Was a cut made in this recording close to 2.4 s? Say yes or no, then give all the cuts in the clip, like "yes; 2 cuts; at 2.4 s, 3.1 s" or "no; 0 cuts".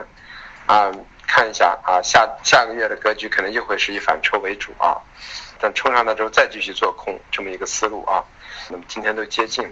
yes; 3 cuts; at 2.4 s, 5.6 s, 8.7 s